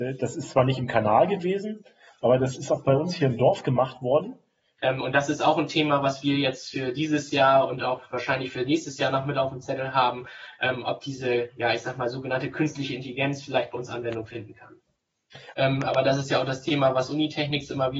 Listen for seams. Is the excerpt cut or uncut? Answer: cut